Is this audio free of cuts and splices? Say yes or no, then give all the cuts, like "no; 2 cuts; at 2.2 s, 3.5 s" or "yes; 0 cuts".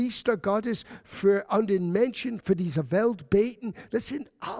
no; 1 cut; at 2.4 s